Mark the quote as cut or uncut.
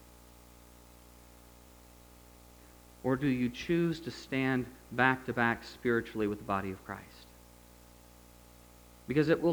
uncut